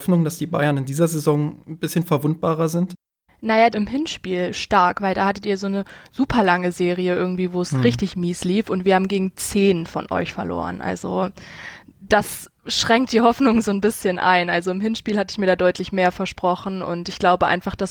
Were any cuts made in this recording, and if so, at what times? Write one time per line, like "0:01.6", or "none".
0:03.7